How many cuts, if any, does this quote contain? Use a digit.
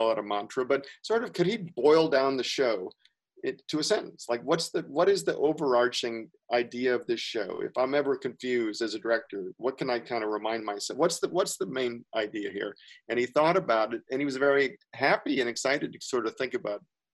0